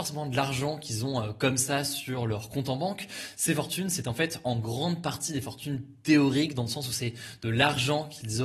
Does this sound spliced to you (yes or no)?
no